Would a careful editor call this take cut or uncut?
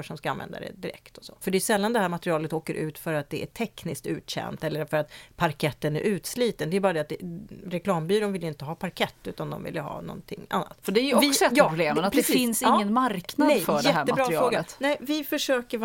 cut